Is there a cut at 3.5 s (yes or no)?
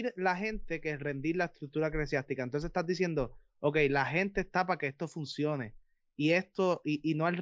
no